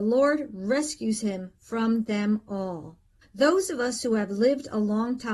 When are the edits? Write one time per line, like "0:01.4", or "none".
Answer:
0:03.2